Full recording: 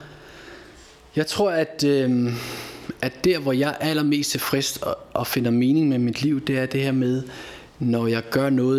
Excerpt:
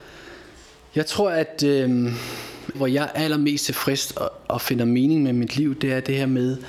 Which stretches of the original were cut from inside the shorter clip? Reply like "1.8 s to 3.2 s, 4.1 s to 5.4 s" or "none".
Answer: 3.0 s to 3.4 s

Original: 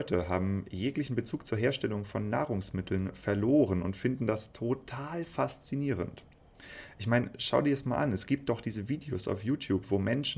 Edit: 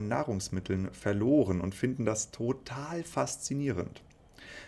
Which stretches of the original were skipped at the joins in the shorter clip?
none

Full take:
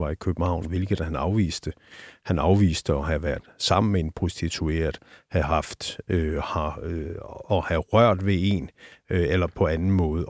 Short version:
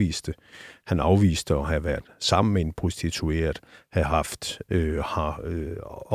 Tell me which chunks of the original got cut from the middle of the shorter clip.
none

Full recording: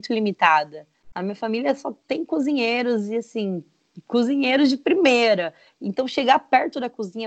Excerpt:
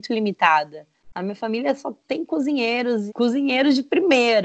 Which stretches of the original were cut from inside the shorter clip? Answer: 3.1 s to 4.0 s

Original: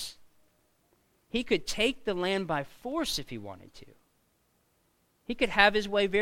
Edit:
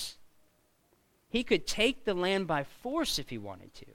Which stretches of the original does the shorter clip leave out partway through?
none

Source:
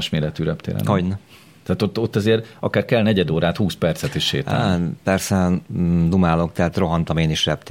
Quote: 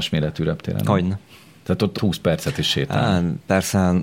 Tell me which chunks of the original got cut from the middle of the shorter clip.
2.0 s to 3.5 s

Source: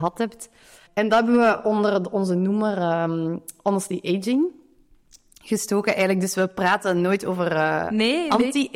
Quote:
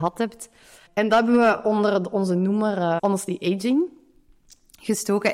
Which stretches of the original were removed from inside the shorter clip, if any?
3.0 s to 3.6 s

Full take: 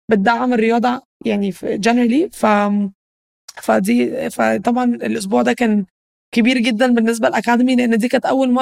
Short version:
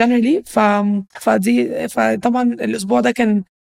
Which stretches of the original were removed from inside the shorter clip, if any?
3.0 s to 3.5 s

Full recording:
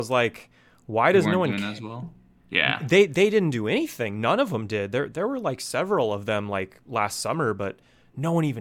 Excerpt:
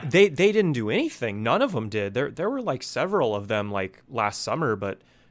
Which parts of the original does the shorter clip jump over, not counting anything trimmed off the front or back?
none

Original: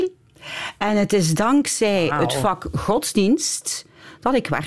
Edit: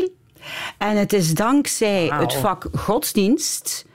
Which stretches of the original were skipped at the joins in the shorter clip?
none

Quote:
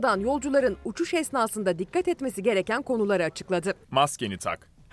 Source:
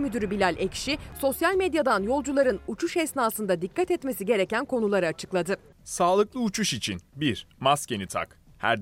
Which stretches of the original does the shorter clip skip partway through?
5.7 s to 7.5 s

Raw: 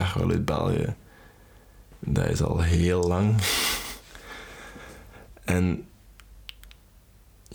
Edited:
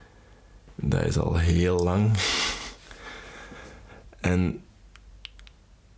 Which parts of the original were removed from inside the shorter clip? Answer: none

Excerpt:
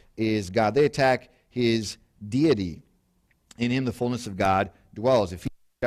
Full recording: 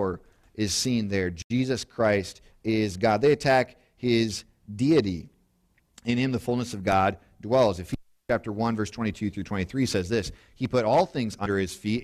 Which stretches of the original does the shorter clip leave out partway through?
none

